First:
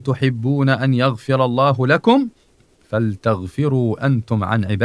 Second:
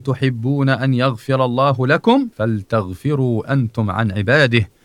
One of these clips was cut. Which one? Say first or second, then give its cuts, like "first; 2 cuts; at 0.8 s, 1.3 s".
second; 1 cut; at 2.3 s